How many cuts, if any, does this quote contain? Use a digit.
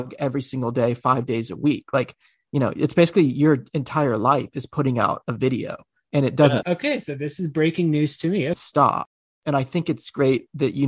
2